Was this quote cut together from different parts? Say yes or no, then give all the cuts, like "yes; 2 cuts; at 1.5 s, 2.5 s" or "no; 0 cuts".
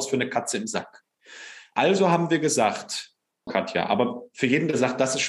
yes; 1 cut; at 3.5 s